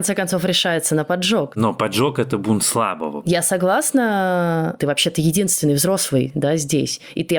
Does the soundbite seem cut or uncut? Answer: cut